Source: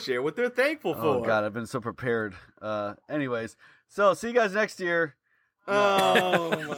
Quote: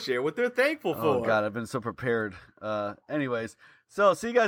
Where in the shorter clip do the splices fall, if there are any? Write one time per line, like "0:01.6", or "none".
none

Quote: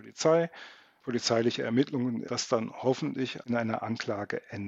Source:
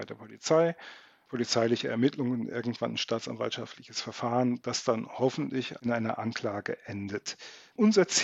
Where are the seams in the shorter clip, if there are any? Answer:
0:02.3

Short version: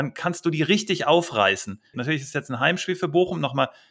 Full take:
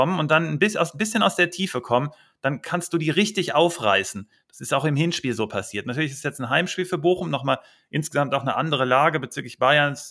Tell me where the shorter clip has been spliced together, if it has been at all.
0:01.9

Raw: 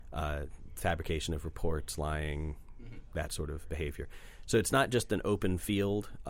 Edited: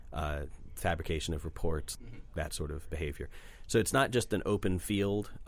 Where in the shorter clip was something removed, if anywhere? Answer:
0:01.9

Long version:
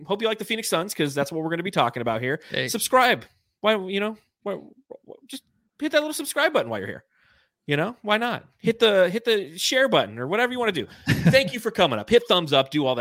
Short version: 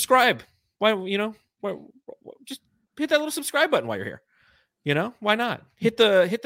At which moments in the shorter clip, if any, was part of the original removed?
none

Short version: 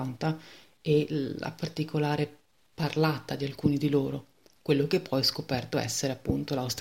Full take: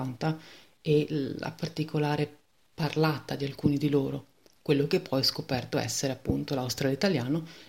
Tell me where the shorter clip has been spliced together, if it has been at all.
none

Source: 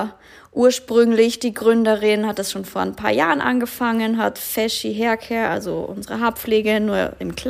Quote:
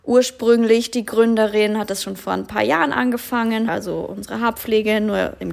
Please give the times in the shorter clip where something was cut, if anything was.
0:03.7

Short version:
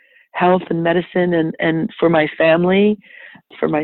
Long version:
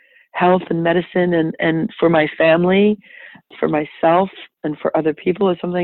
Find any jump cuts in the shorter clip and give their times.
none

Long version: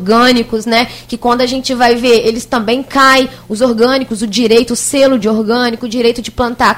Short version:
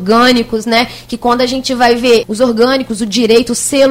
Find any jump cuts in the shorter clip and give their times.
0:02.2

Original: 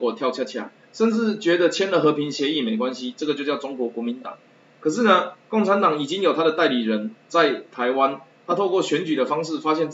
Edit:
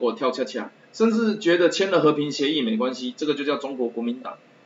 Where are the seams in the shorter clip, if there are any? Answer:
none

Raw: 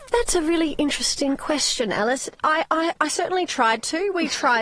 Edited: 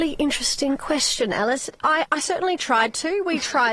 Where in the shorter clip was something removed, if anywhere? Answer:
0:02.1

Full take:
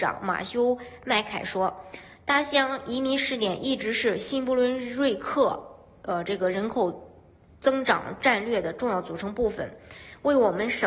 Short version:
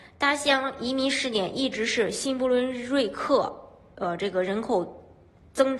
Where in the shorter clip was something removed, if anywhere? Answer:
none

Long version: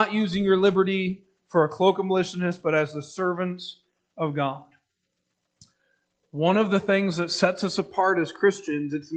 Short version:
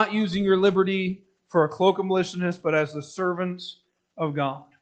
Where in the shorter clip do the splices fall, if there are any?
none

